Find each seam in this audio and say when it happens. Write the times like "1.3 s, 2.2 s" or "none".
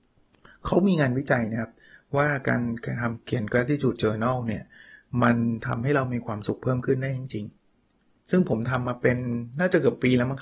none